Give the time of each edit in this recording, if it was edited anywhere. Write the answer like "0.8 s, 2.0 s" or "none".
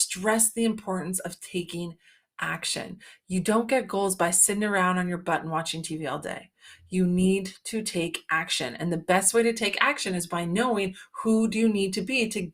none